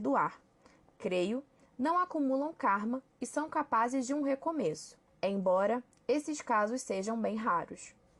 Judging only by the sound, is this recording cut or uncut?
cut